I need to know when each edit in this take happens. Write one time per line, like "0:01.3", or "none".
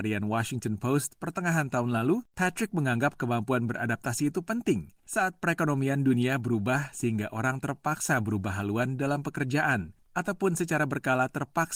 0:05.0
0:10.1